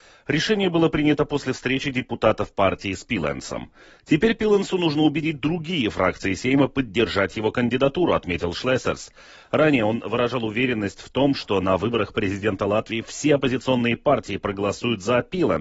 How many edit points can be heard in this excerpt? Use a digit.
0